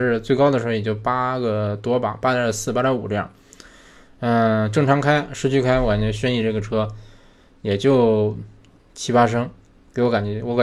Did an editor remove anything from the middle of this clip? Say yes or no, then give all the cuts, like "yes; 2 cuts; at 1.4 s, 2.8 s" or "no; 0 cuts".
no; 0 cuts